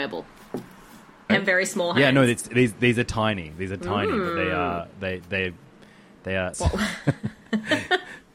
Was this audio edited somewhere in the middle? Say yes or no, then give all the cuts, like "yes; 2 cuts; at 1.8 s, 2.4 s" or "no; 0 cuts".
yes; 2 cuts; at 1.3 s, 6.5 s